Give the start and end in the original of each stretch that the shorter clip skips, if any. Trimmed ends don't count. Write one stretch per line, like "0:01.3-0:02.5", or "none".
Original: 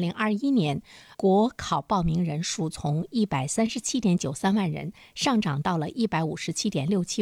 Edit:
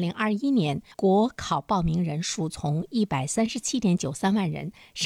0:00.9-0:01.1